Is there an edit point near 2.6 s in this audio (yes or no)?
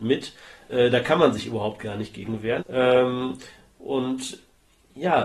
yes